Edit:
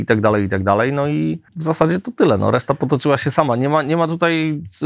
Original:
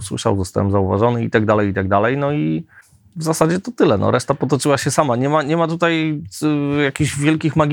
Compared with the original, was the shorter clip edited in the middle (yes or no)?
yes